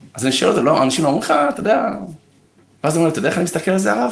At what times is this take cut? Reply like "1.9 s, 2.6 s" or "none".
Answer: none